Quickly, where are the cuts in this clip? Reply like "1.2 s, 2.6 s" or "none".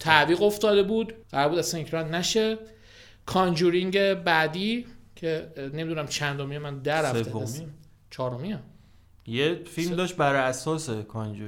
1.2 s